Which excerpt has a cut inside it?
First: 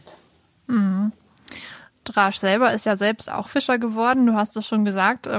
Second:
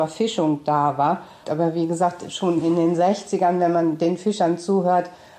second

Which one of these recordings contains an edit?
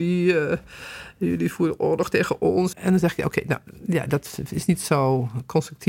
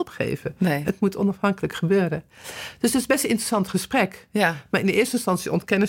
first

